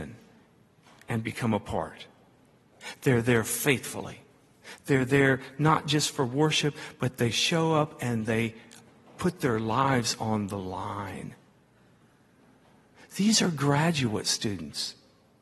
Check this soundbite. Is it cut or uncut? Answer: uncut